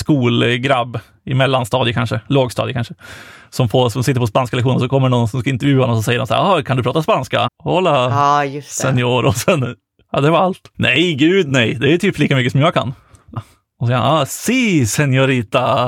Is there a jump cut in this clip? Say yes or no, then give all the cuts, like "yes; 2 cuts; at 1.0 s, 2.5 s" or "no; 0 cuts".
yes; 3 cuts; at 7.5 s, 10.7 s, 13.4 s